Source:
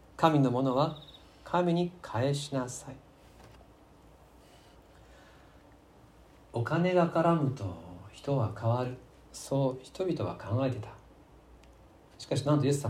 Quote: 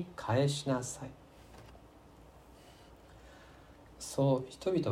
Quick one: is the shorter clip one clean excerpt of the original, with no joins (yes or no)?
no